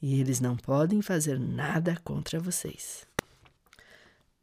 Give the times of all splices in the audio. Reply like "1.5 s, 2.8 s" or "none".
none